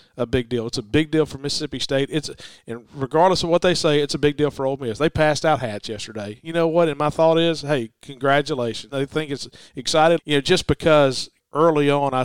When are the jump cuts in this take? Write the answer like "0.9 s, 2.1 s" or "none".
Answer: 8.9 s, 10.2 s